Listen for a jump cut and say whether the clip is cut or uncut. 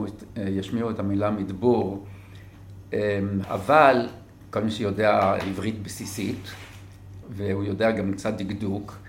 cut